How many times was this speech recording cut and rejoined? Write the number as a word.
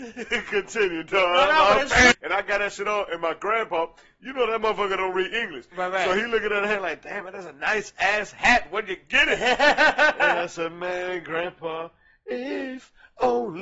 one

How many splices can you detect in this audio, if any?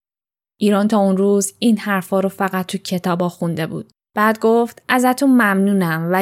one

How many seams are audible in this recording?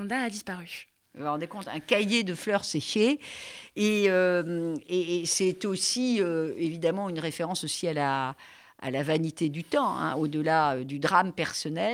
zero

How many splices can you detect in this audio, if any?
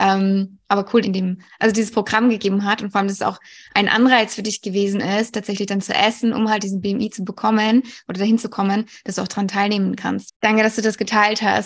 two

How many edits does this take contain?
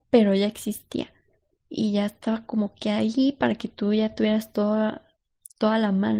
zero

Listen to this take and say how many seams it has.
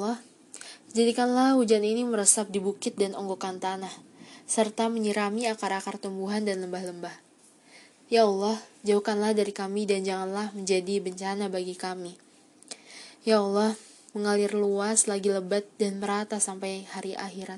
one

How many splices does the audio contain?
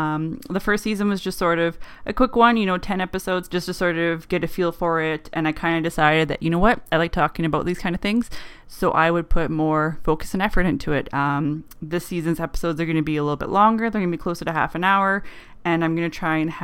two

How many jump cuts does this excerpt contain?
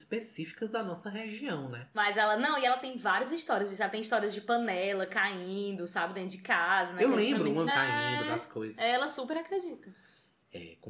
two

